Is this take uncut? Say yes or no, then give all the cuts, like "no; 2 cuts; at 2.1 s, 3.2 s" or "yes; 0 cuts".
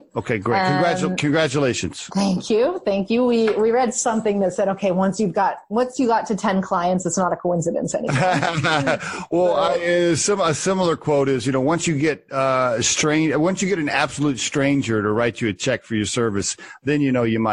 yes; 0 cuts